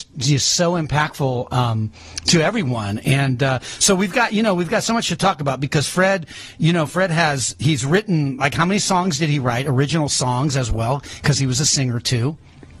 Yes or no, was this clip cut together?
no